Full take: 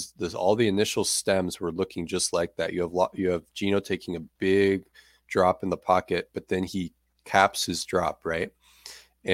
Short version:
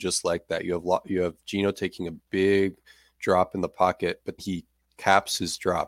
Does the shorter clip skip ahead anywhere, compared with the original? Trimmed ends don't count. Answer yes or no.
yes